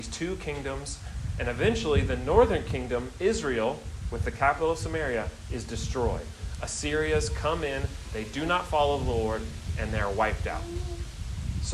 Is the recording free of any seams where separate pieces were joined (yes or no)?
yes